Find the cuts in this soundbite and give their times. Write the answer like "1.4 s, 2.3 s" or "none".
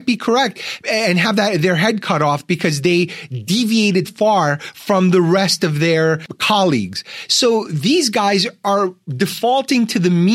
4.0 s